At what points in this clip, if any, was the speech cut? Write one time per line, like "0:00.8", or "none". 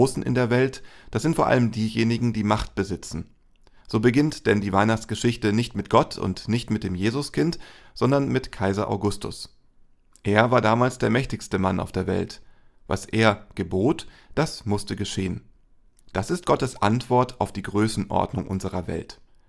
0:16.0